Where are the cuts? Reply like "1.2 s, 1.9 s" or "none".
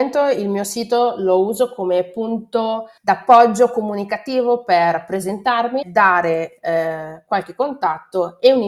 3.0 s, 5.8 s